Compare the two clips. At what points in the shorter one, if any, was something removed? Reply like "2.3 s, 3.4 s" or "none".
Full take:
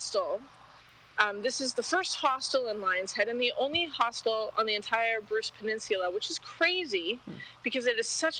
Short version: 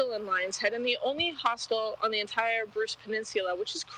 none